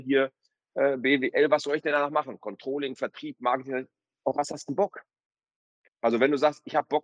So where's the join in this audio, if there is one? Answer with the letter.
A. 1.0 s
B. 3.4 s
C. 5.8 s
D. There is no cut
C